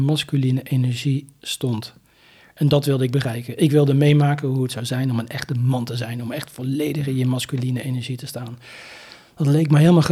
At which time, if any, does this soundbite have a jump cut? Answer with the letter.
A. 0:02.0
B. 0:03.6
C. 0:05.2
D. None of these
D